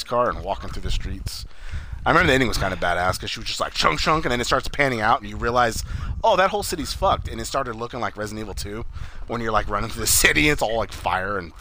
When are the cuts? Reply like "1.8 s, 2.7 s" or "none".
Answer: none